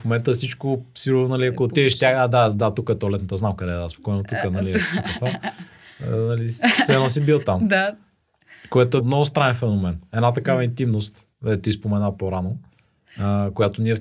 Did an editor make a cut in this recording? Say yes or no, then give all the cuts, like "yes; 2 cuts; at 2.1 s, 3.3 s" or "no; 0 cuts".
yes; 2 cuts; at 9.0 s, 11.3 s